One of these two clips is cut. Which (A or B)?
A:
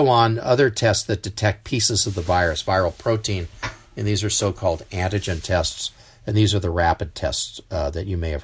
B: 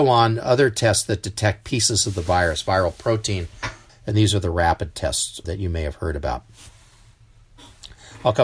B